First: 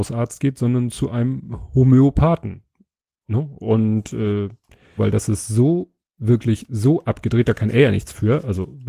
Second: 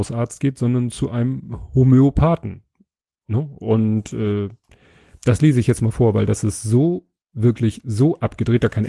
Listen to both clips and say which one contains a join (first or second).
first